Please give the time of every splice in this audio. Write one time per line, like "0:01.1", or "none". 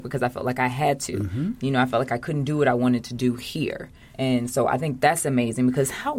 none

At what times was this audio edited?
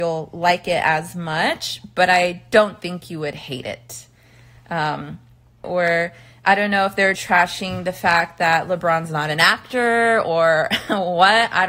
0:05.6
0:07.2

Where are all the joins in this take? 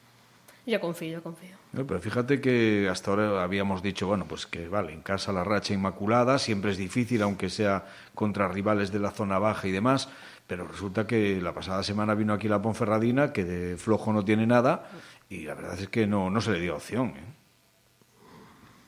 none

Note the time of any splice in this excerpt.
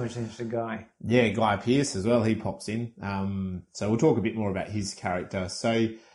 none

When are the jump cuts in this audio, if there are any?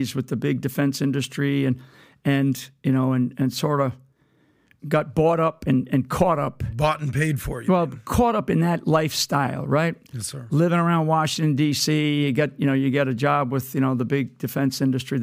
none

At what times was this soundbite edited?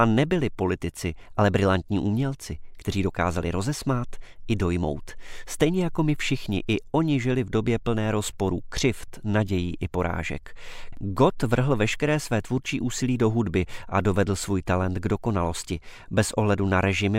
0:10.9

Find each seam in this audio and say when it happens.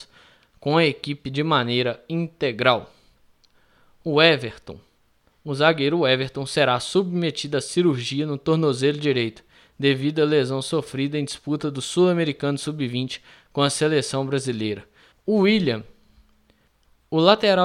0:15.1

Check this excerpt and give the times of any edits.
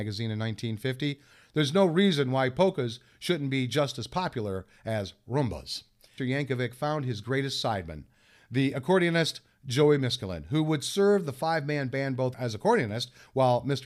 0:06.2
0:12.3

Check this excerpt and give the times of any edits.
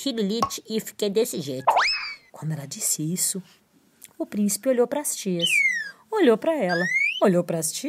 0:02.3

